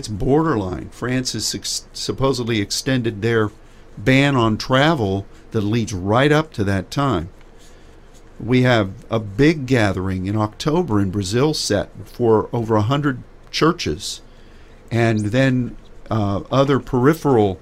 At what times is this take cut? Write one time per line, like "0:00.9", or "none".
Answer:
none